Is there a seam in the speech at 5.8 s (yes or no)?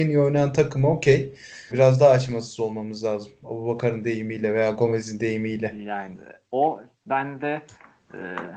no